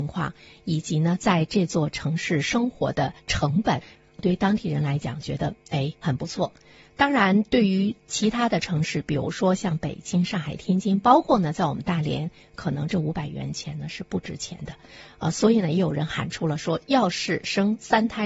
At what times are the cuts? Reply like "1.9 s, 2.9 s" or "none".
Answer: none